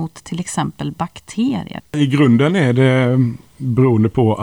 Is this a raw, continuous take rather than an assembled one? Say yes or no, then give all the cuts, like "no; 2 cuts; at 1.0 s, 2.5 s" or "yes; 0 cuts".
no; 1 cut; at 1.8 s